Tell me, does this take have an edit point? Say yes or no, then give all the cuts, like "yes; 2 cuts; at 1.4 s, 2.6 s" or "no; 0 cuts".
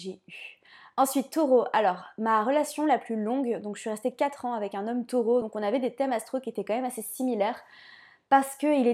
no; 0 cuts